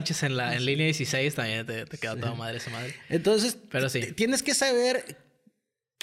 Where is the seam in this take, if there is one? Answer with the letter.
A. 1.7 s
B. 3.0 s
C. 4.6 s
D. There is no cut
D